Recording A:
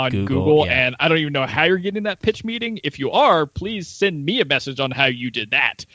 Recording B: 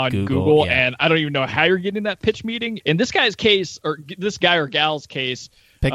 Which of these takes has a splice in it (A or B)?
B